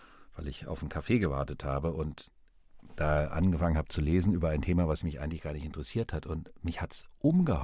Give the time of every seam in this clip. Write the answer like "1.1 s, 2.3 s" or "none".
none